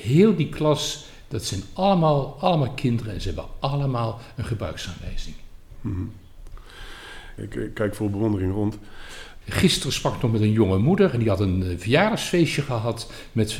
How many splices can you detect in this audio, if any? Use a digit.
2